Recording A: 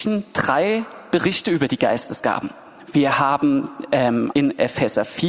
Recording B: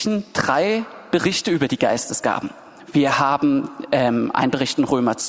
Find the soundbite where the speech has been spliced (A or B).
A